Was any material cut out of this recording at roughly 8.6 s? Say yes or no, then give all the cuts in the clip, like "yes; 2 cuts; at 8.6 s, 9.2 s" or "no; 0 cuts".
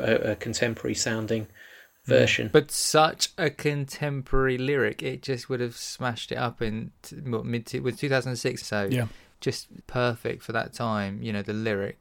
yes; 2 cuts; at 8.6 s, 9.8 s